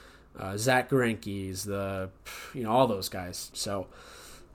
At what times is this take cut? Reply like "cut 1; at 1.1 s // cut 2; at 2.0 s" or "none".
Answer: cut 1; at 3.5 s